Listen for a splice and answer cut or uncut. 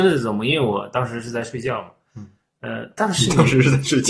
uncut